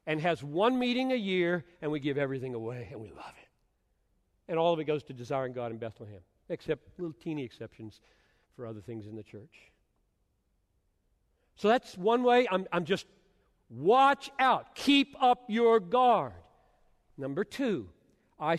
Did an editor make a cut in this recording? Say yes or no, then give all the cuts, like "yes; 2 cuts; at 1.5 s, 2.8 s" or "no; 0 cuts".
no; 0 cuts